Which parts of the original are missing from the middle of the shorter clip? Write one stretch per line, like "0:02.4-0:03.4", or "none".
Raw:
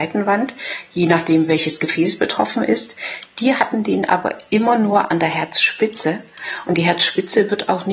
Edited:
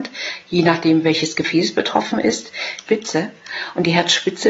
0:03.3-0:05.8